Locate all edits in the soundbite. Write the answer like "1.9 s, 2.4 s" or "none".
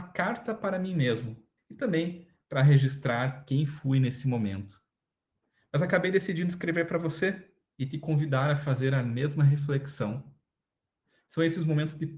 1.6 s